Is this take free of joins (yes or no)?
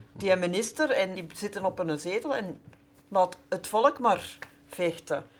no